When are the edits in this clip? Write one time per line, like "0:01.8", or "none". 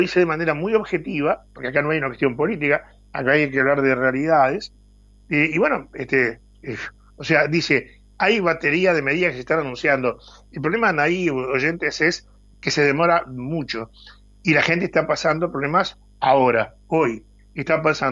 none